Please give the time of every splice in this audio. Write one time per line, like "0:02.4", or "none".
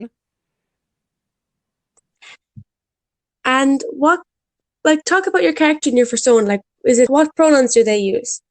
0:07.1